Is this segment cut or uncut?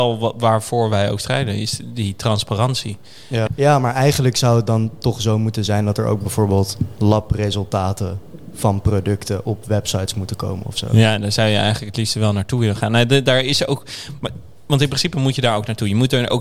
cut